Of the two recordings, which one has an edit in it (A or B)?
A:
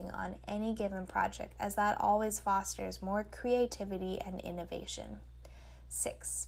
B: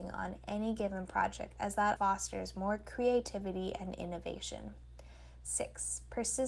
B